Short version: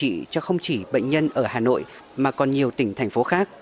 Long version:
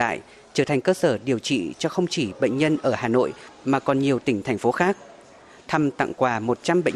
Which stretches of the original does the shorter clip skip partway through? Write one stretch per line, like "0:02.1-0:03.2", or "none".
none